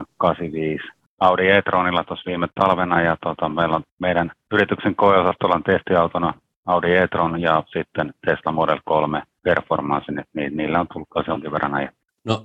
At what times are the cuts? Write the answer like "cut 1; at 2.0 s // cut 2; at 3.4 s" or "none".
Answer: cut 1; at 1.1 s